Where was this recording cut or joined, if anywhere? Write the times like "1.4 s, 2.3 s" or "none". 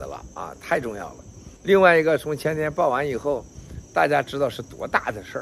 1.6 s